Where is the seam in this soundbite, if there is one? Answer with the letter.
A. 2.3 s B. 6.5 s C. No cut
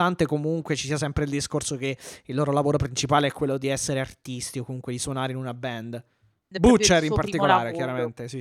B